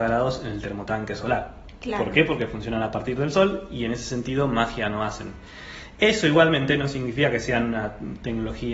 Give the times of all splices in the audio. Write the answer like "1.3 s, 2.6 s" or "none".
none